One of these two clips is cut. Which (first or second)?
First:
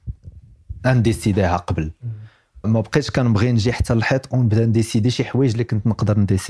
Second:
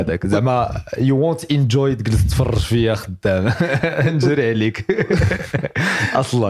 first